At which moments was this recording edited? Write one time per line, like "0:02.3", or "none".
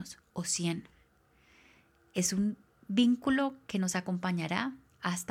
none